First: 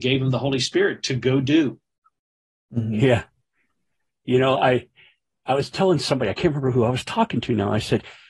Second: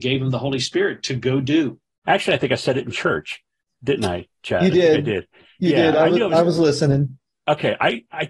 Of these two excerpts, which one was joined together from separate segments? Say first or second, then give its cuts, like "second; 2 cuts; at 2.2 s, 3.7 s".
second; 1 cut; at 2.0 s